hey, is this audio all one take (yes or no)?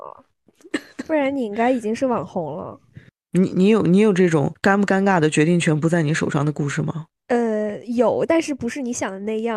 yes